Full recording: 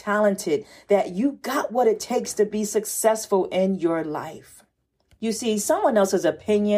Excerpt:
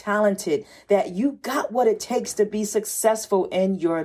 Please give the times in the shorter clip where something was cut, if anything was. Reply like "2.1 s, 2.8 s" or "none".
none